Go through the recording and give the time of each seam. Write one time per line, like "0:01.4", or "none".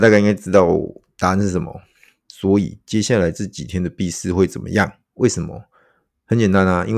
0:02.3
0:05.1